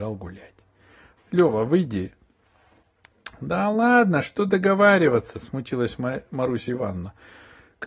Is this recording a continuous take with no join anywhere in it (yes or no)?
no